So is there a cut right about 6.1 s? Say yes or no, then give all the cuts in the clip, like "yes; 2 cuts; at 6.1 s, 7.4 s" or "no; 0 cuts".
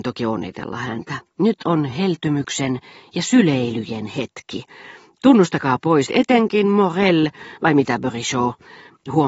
yes; 1 cut; at 6.1 s